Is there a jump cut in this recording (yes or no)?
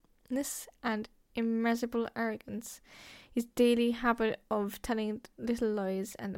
no